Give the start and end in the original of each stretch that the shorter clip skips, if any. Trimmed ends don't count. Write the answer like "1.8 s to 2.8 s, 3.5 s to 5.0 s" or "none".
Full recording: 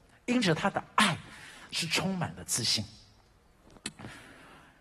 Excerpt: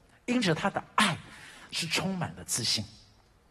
none